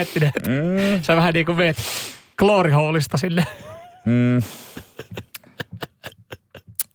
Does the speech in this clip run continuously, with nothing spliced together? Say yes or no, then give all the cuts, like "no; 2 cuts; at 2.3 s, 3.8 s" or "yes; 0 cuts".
yes; 0 cuts